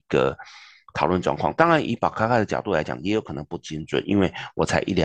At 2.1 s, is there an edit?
no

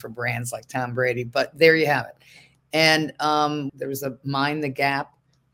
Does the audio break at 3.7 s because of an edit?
yes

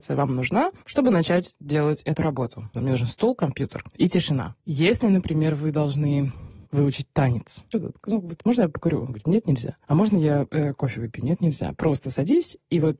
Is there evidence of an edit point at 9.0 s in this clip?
no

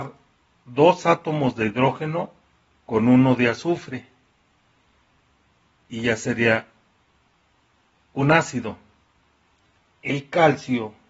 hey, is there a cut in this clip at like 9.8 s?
yes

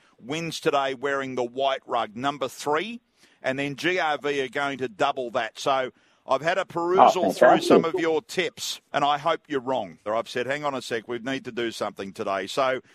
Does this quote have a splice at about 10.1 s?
yes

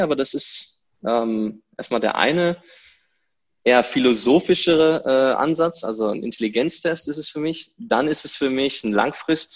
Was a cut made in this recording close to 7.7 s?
no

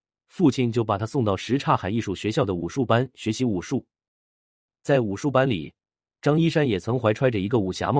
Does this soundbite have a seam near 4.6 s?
no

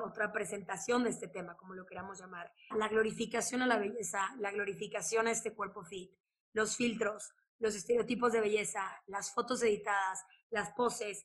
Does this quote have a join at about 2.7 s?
yes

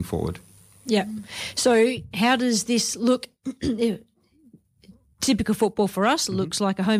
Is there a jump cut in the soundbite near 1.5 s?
no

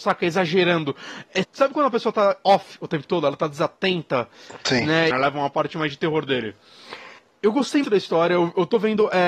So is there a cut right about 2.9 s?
no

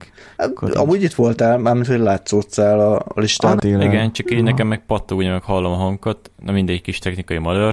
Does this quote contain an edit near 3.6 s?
yes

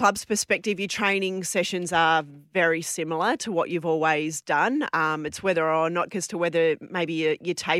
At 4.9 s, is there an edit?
no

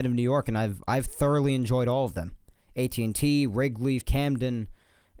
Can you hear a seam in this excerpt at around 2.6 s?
no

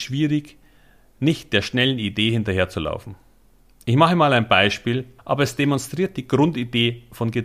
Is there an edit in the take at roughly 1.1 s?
no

